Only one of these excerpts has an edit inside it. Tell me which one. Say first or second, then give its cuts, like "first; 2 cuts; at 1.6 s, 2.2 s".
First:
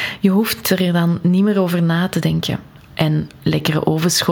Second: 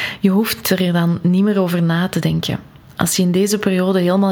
first; 1 cut; at 2.8 s